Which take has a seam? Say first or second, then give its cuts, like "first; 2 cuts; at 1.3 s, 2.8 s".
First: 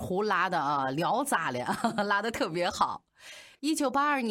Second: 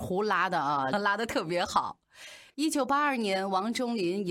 second; 1 cut; at 0.9 s